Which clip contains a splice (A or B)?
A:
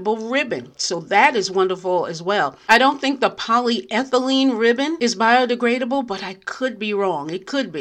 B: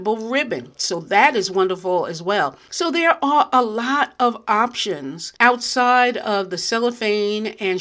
B